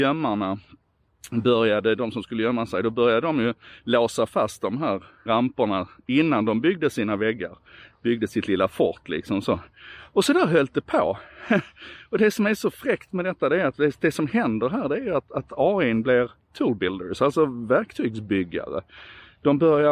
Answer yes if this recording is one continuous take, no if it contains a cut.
no